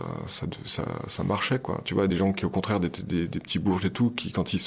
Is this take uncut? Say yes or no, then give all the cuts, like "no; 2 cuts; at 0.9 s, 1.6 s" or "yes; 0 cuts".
yes; 0 cuts